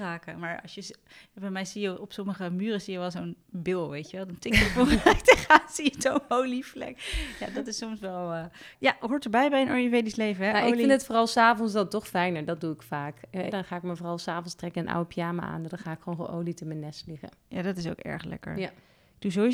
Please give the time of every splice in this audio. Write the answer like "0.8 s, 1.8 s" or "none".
8.7 s, 13.5 s